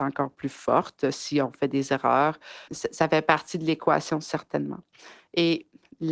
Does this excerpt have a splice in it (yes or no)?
yes